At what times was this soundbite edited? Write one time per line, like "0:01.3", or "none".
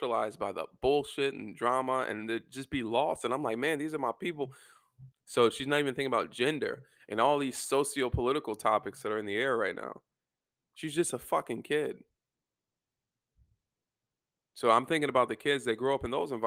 0:05.1